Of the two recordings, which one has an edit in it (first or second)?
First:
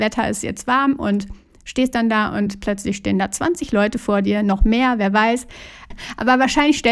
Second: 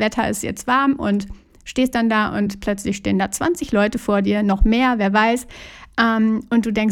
first